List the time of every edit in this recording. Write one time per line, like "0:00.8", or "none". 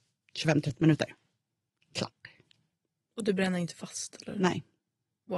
none